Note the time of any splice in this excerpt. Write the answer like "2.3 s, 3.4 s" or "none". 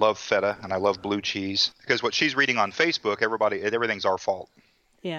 1.7 s